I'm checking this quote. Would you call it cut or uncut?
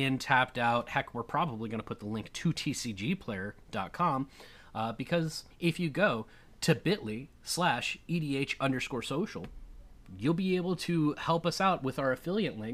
cut